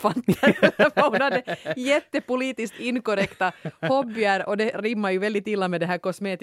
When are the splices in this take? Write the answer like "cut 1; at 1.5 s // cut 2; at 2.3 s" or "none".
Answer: none

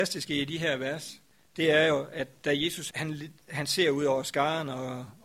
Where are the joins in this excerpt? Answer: cut 1; at 2.9 s

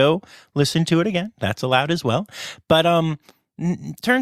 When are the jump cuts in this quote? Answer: none

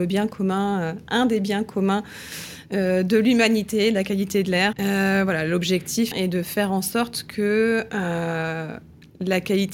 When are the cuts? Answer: cut 1; at 4.7 s // cut 2; at 6.1 s

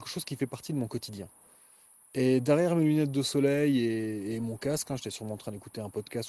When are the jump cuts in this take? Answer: none

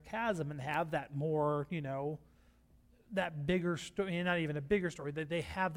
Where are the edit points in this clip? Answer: none

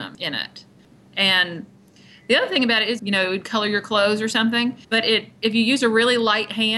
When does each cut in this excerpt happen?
cut 1; at 3.0 s // cut 2; at 4.8 s

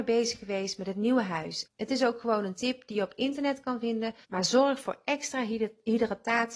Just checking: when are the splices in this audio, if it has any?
cut 1; at 1.7 s // cut 2; at 4.2 s

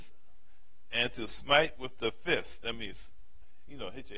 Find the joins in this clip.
none

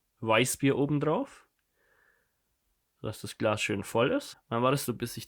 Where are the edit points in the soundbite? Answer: cut 1; at 4.3 s

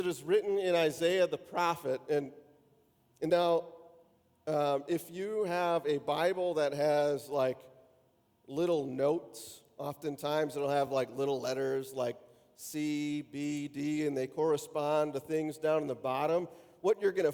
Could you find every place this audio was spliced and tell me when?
none

